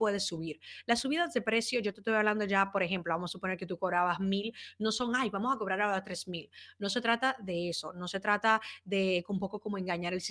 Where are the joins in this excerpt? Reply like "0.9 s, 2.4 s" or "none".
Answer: none